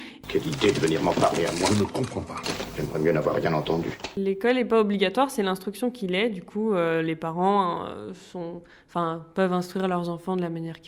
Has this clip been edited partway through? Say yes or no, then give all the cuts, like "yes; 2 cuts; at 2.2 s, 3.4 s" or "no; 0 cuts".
no; 0 cuts